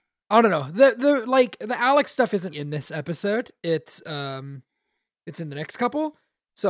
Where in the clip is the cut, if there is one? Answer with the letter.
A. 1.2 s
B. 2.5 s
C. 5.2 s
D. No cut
B